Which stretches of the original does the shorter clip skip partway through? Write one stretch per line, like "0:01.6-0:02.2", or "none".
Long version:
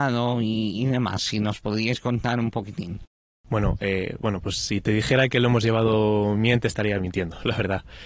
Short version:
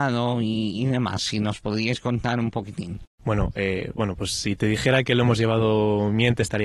0:03.1-0:03.4